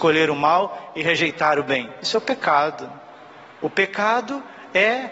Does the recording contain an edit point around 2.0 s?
no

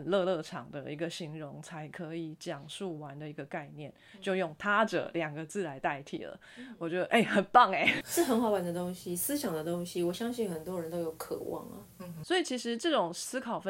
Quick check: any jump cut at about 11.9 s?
no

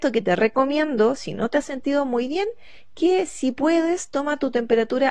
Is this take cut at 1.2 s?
no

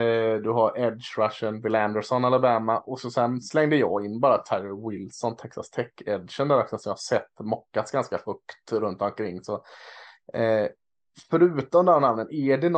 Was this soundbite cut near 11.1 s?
no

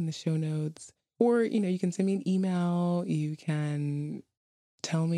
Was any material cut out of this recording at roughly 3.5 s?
no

